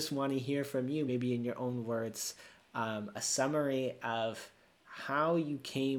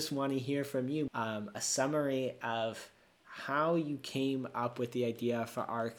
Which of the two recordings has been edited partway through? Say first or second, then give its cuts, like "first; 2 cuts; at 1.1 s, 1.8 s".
second; 1 cut; at 1.1 s